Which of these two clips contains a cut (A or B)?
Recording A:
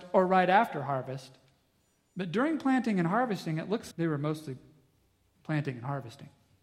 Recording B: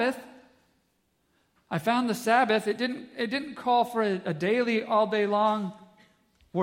A